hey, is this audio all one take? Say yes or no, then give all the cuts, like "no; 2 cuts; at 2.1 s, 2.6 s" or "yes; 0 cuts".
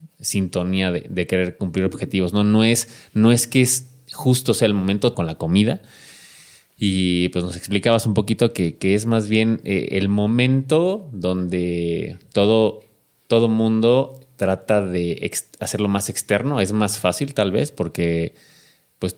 no; 1 cut; at 5.1 s